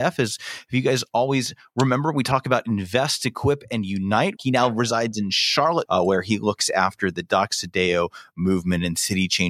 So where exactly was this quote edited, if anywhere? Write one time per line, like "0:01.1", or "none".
0:04.4
0:05.9